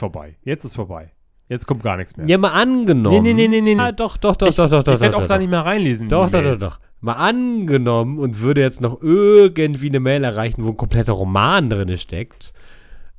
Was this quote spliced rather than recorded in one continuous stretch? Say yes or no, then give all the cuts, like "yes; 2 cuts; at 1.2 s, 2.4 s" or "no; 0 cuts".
yes; 1 cut; at 3.8 s